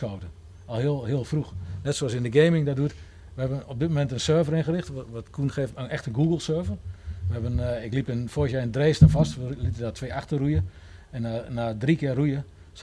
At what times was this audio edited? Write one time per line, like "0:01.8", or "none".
0:05.7